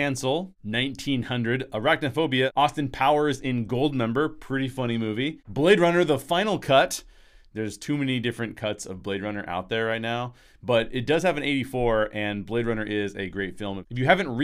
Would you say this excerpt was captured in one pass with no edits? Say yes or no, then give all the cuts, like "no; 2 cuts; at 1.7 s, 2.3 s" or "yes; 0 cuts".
yes; 0 cuts